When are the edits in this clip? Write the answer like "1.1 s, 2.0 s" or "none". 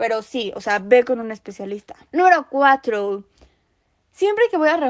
2.0 s